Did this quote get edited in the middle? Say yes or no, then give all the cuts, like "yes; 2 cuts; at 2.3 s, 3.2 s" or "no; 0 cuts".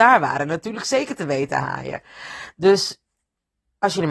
no; 0 cuts